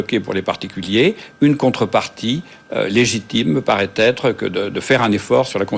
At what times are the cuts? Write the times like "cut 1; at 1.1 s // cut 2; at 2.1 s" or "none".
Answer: none

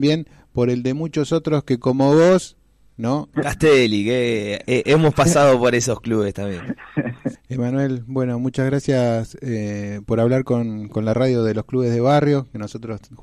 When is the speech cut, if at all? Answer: cut 1; at 3.3 s // cut 2; at 7.4 s

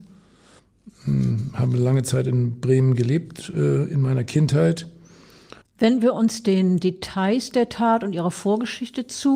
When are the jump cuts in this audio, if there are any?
cut 1; at 5.6 s

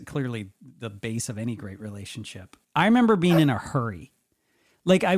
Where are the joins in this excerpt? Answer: cut 1; at 2.6 s

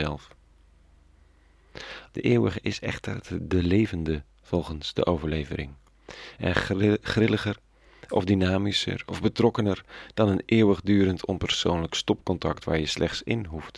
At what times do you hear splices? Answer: cut 1; at 2.1 s

